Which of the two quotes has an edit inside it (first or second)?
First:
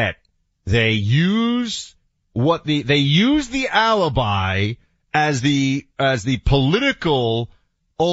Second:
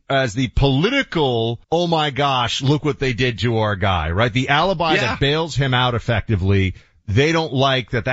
second